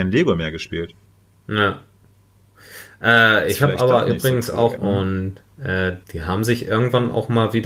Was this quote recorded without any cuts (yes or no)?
no